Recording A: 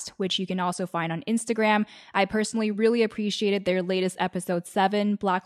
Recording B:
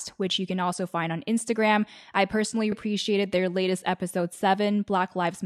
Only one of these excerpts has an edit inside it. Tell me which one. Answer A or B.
B